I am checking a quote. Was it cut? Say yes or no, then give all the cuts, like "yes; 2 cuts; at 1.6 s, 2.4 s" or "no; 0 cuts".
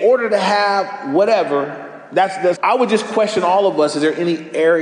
yes; 1 cut; at 2.5 s